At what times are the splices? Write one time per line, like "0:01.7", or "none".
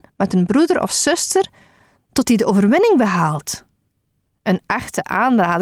0:04.3